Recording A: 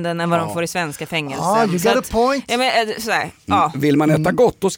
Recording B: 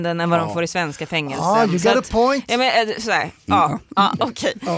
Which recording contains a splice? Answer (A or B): B